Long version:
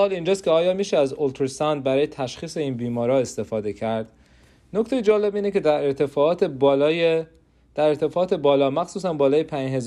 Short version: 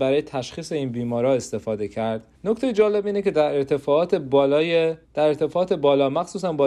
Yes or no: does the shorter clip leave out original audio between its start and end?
yes